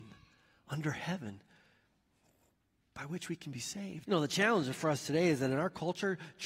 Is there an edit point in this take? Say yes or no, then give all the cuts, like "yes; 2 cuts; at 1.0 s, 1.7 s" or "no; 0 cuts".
yes; 1 cut; at 4.0 s